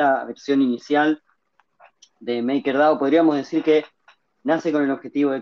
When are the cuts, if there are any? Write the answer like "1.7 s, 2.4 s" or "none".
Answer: none